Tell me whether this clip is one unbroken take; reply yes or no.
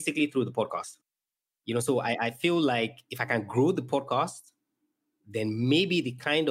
yes